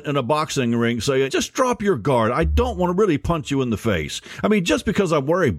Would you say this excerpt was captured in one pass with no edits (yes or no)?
no